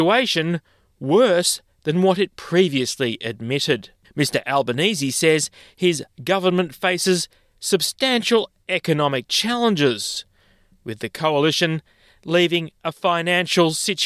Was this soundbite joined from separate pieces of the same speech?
yes; 1 cut; at 4.0 s

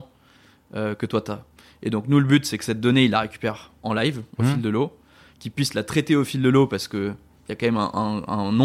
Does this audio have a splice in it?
no; 0 cuts

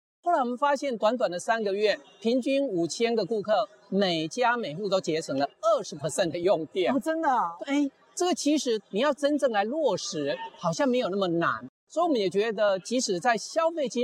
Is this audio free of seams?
no; 2 cuts; at 7.6 s, 8.8 s

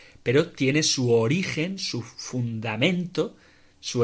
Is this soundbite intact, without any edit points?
yes; 0 cuts

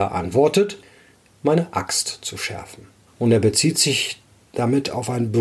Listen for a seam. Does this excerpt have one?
yes; 2 cuts; at 1.3 s, 3.1 s

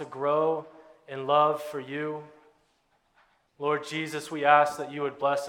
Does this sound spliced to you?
yes; 1 cut; at 3.5 s

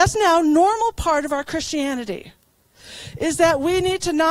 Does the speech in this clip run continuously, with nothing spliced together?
yes; 0 cuts

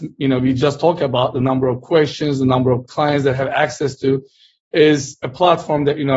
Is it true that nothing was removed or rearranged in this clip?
yes; 0 cuts

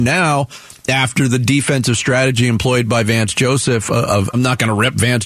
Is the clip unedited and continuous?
no; 1 cut; at 4.3 s

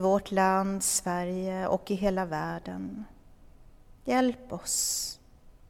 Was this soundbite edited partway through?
no; 0 cuts

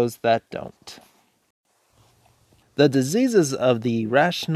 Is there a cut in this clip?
yes; 1 cut; at 2.6 s

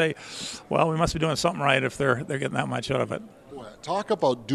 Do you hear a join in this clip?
no; 0 cuts

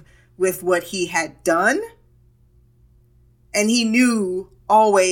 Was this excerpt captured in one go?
yes; 0 cuts

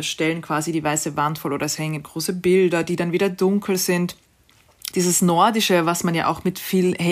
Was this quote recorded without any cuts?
no; 1 cut; at 4.9 s

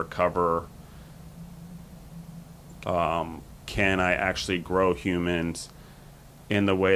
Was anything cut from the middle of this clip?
yes; 1 cut; at 2.8 s

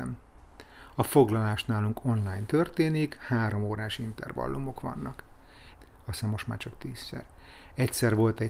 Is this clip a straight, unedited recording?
no; 1 cut; at 5.7 s

